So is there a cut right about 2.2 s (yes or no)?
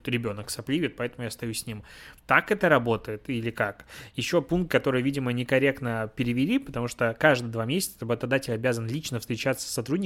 yes